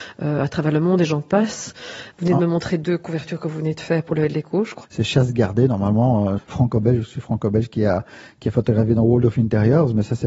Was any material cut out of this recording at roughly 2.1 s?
yes; 3 cuts; at 2.1 s, 4.8 s, 6.4 s

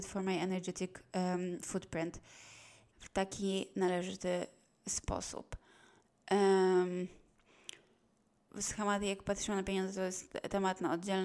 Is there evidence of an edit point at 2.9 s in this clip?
yes; 2 cuts; at 2.9 s, 8.5 s

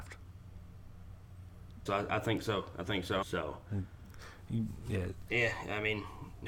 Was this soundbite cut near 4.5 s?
no; 2 cuts; at 1.9 s, 3.2 s

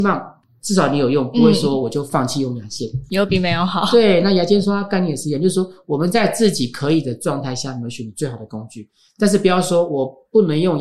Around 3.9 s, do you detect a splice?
no; 0 cuts

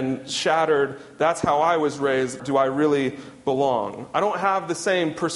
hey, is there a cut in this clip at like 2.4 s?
yes; 1 cut; at 2.4 s

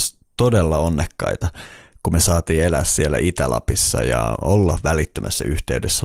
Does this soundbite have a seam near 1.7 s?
no; 0 cuts

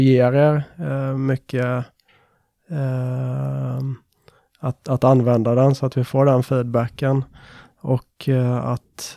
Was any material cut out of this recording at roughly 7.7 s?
no; 0 cuts

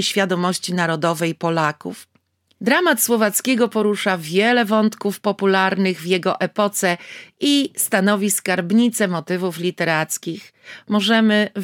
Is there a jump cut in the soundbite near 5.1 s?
no; 1 cut; at 2.6 s

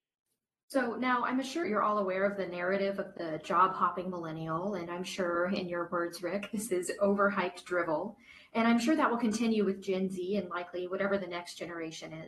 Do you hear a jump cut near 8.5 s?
no; 1 cut; at 1.6 s

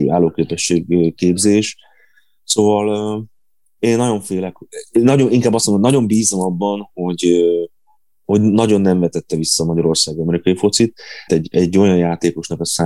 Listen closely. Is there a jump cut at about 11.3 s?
yes; 1 cut; at 11.3 s

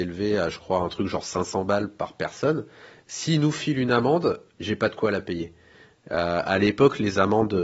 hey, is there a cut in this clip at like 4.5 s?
yes; 2 cuts; at 3.0 s, 4.5 s

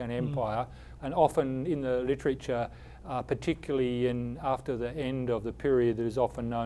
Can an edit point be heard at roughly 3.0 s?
no; 1 cut; at 1.0 s

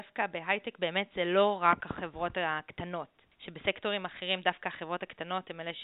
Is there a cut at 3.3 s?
yes; 1 cut; at 3.3 s

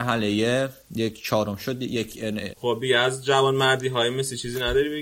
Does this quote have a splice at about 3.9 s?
no; 1 cut; at 2.5 s

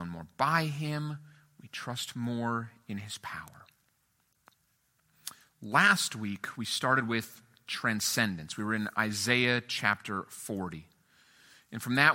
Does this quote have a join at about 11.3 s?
no; 0 cuts

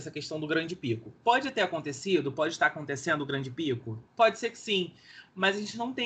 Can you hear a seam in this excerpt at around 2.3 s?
no; 1 cut; at 4.1 s

